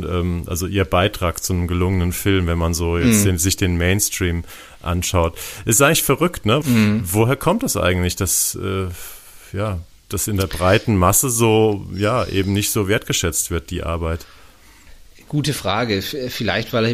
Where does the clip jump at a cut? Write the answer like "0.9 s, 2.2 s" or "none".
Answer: 6.6 s